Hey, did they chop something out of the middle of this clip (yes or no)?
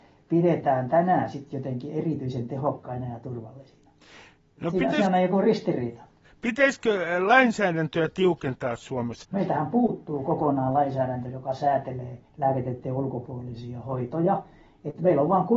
yes